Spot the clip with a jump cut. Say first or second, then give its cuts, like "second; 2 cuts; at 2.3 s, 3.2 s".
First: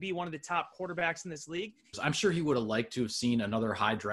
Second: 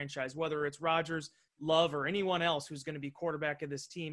first; 1 cut; at 1.9 s